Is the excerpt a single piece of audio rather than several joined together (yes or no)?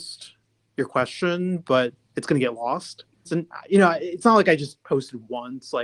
no